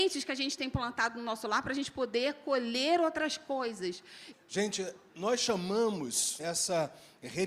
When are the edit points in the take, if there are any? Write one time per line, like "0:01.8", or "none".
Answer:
0:04.3
0:06.4